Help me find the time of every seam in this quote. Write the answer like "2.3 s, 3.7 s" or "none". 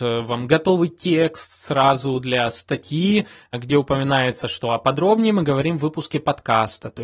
none